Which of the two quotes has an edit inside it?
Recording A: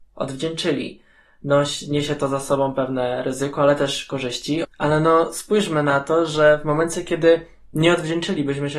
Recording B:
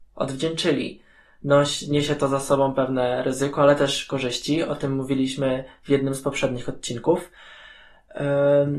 A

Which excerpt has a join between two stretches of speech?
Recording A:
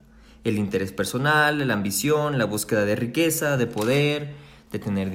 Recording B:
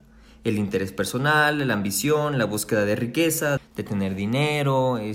B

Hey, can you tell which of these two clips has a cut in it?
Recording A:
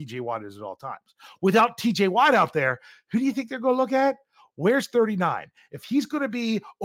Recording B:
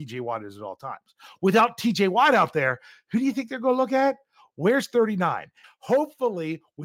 B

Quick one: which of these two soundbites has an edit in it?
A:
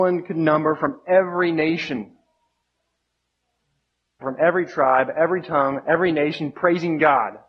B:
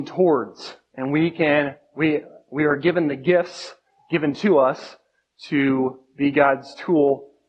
A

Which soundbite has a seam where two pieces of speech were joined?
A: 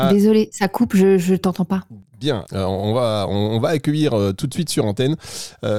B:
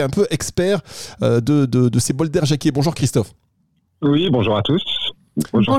A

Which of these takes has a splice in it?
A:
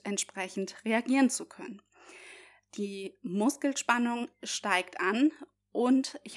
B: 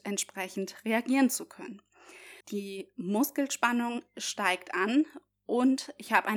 B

